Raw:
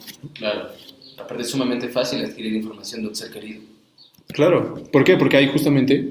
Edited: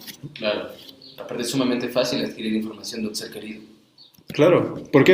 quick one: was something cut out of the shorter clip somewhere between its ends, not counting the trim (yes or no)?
no